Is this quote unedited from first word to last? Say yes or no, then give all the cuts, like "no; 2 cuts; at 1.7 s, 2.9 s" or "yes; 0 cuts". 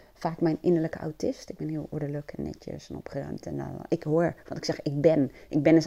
yes; 0 cuts